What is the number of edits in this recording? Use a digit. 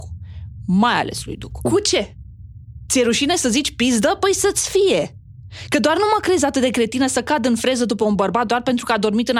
1